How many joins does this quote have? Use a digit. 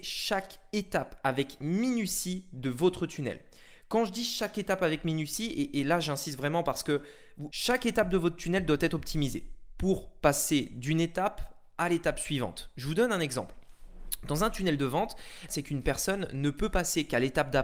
2